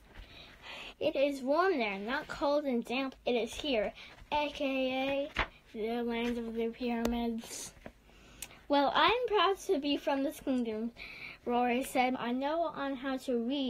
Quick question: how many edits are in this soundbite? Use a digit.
3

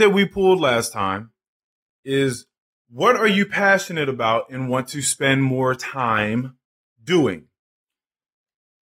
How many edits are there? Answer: 0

